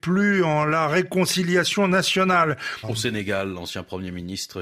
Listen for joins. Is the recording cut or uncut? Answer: cut